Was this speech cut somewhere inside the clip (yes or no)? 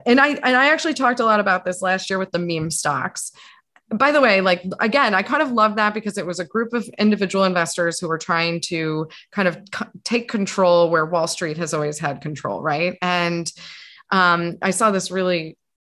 no